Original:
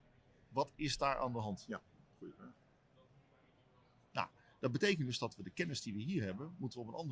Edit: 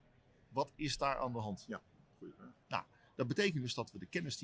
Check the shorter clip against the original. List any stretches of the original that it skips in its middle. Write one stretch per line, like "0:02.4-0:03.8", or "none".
0:02.6-0:04.1